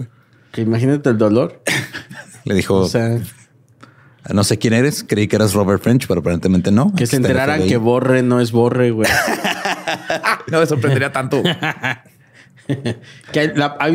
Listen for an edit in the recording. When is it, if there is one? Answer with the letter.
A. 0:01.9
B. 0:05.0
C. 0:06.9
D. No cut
D